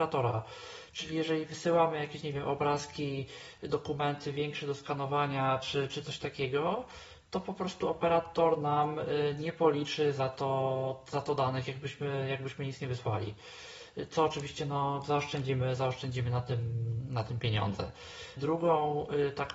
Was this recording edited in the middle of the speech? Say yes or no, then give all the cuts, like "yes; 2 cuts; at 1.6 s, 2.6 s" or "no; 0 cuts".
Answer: yes; 1 cut; at 18.4 s